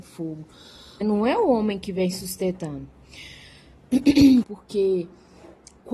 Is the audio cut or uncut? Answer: cut